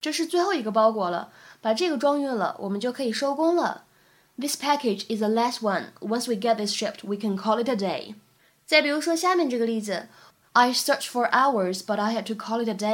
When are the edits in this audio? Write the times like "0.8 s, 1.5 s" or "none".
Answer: none